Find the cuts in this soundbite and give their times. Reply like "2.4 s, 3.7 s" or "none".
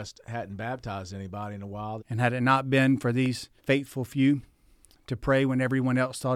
2.0 s, 3.6 s